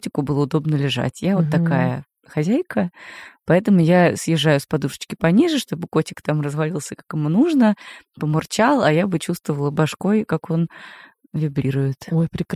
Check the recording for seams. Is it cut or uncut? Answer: uncut